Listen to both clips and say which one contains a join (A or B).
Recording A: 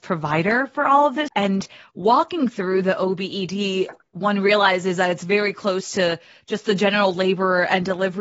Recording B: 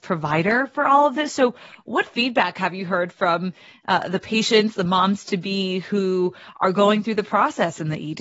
A